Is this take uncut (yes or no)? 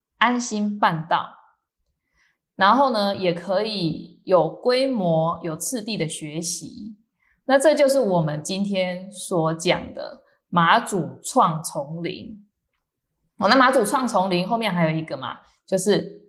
yes